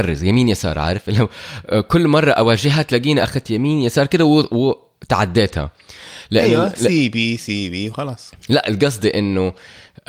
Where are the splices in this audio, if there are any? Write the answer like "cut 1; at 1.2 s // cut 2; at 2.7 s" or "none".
none